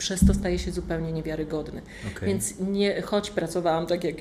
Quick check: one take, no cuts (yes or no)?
yes